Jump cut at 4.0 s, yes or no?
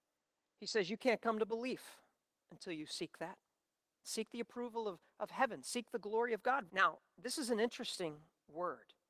yes